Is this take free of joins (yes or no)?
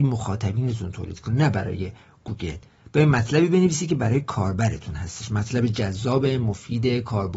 yes